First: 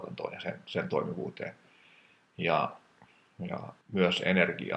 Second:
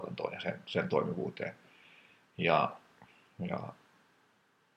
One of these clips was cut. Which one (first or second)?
first